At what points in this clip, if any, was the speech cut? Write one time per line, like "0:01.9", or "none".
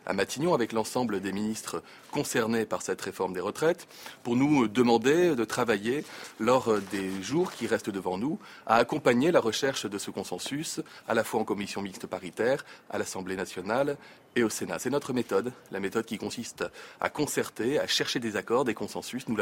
none